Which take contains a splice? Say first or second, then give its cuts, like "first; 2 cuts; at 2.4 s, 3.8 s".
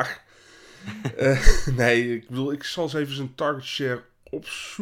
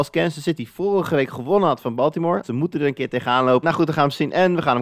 second; 2 cuts; at 2.4 s, 3.6 s